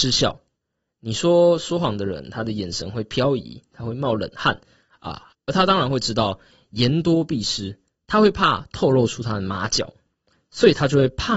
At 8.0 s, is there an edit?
no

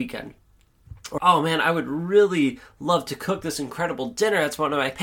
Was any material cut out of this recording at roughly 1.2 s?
yes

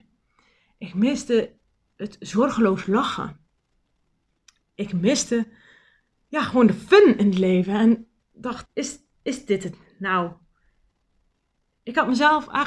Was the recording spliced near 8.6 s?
yes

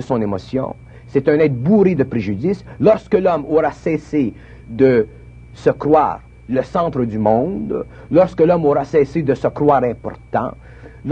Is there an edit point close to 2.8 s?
yes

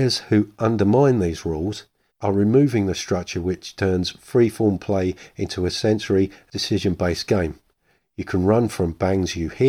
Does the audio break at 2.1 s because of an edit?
yes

